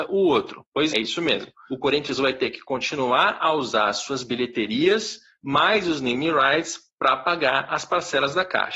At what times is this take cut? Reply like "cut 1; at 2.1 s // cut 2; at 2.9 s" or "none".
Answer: cut 1; at 0.9 s